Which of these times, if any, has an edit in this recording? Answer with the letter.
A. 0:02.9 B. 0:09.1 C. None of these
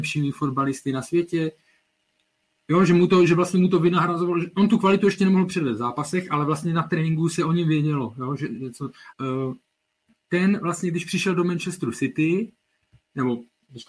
B